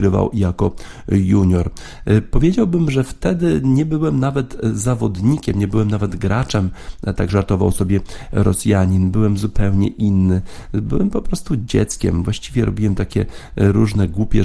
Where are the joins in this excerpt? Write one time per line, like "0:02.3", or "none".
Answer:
none